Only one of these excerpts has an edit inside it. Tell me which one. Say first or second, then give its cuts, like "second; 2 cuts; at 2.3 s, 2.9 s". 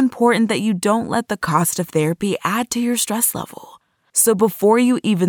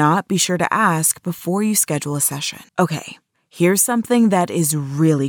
second; 1 cut; at 2.7 s